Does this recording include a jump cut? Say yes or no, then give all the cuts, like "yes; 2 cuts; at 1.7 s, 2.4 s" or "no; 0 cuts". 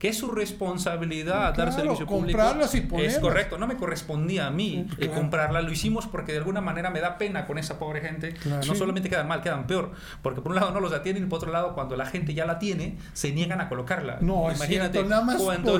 yes; 3 cuts; at 4.9 s, 8.6 s, 14.2 s